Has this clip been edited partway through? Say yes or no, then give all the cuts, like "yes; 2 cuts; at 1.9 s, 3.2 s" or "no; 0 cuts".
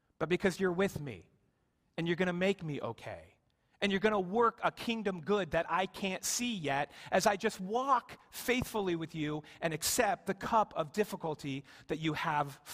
no; 0 cuts